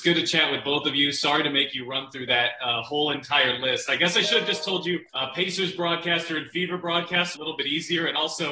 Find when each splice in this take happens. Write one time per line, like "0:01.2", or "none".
0:05.1
0:07.3

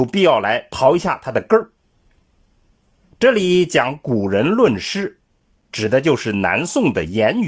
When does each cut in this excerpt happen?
0:03.0

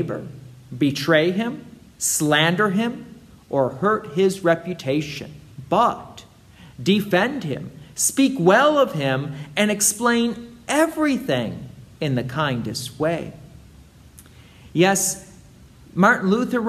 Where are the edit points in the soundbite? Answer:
none

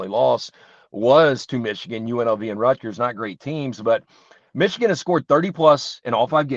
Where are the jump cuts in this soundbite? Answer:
none

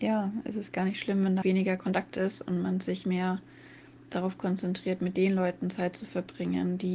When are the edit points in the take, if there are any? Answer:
0:01.4

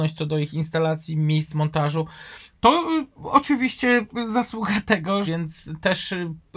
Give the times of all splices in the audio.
0:02.5
0:05.2

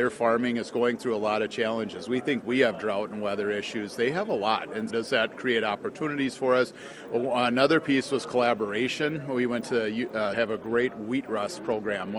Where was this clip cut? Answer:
0:04.9
0:10.3

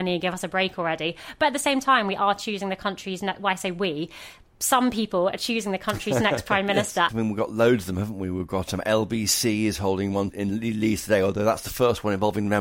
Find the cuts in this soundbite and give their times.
0:07.1

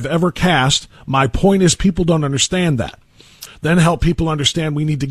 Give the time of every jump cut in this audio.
0:03.5

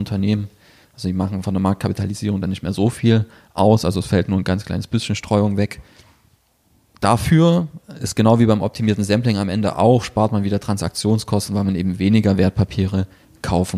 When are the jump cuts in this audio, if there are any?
none

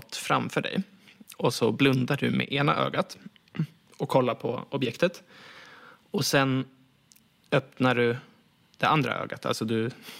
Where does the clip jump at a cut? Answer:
none

